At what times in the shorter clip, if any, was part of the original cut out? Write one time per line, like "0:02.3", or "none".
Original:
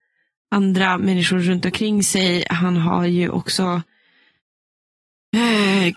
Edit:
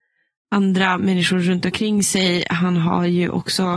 none